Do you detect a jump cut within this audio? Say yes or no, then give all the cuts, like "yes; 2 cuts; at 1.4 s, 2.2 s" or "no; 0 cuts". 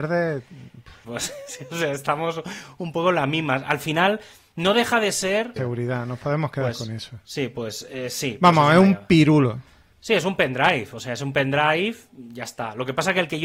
yes; 2 cuts; at 1.0 s, 5.6 s